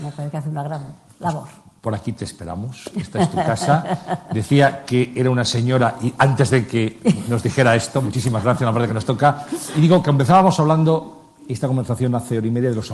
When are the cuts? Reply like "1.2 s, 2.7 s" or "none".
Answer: none